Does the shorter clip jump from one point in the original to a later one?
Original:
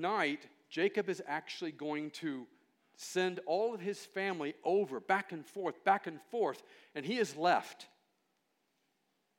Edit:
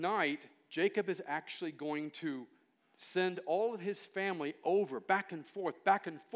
no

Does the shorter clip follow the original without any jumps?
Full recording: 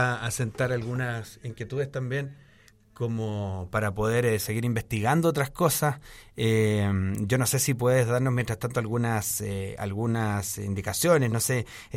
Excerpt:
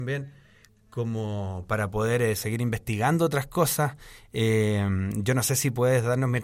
yes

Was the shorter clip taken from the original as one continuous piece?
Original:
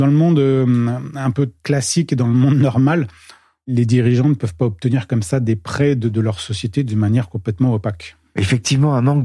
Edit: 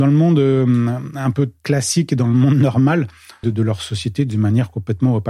no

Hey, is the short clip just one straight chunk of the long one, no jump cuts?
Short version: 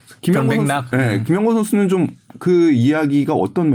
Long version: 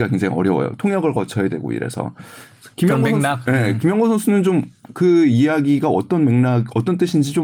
yes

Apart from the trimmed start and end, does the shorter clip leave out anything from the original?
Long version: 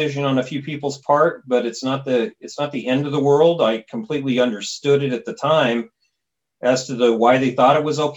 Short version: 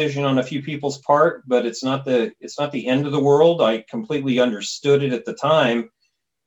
no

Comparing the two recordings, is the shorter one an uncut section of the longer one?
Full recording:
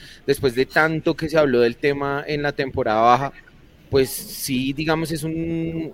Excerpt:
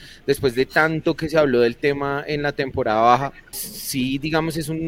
no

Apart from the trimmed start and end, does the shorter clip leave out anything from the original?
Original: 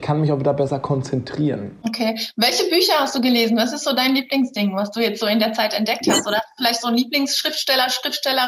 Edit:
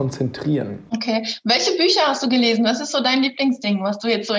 no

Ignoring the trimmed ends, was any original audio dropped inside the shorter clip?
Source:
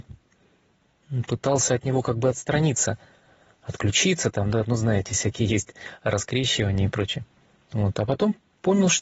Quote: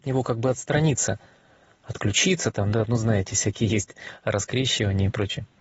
no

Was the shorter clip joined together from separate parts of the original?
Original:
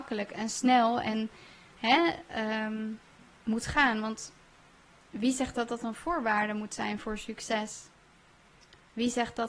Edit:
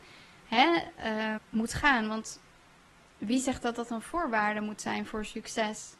yes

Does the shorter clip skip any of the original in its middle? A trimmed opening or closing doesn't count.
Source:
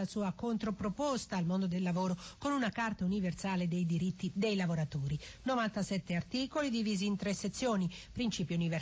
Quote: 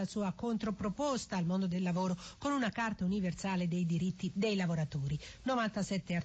no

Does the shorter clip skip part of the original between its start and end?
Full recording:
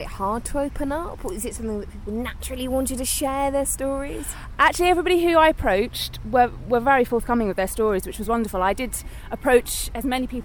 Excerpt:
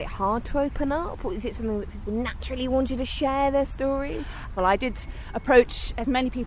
yes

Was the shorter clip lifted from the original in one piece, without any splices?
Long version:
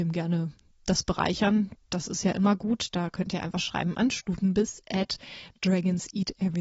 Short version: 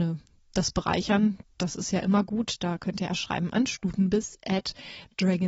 no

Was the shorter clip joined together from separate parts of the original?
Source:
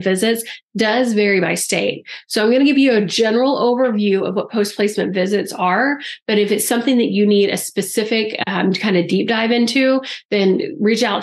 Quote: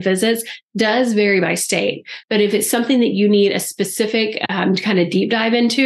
yes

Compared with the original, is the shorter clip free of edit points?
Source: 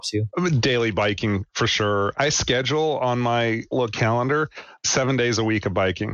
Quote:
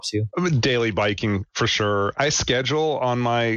yes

